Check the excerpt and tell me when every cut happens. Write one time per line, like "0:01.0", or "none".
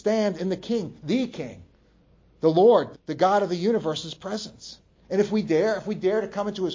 0:02.9

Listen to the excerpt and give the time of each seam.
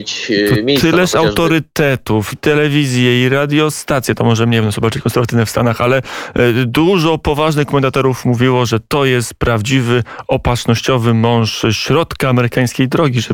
0:02.3

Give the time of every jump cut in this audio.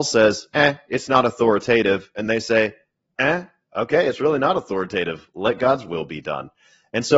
none

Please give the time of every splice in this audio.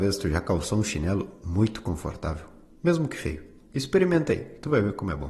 0:03.6

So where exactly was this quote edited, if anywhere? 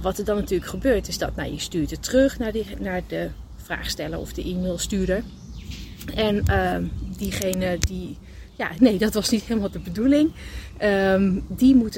0:08.8

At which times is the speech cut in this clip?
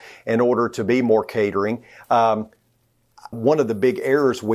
0:03.3

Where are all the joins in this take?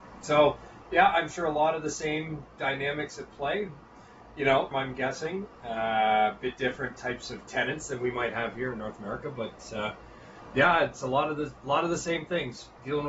0:04.7

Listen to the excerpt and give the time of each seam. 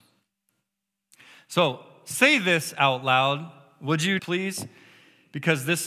0:04.2

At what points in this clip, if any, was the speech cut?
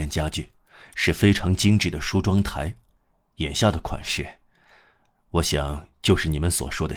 none

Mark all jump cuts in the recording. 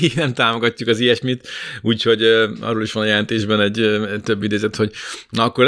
none

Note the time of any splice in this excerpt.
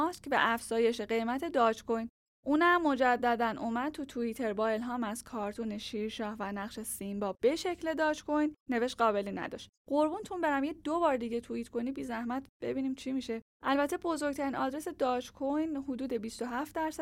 0:02.3

